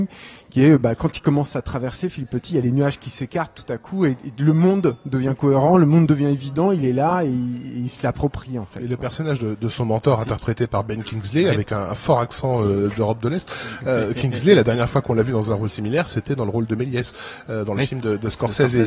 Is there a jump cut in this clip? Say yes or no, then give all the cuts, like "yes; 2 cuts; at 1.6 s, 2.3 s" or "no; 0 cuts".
no; 0 cuts